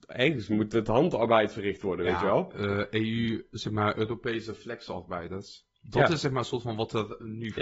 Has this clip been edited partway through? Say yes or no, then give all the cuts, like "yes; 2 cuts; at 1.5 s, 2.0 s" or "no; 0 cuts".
no; 0 cuts